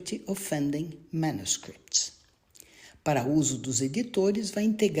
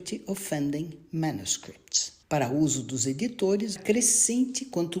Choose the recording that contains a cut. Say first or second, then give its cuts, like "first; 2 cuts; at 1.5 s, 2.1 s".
second; 2 cuts; at 2.2 s, 3.8 s